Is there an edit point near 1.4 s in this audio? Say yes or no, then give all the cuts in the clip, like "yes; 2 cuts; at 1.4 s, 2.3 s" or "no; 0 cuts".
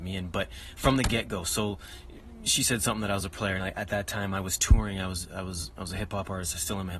no; 1 cut; at 3.6 s